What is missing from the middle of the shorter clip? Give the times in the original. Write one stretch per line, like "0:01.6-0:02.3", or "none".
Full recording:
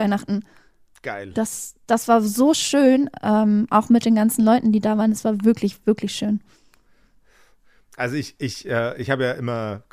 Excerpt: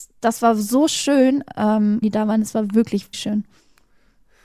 0:03.7-0:04.7
0:05.8-0:06.1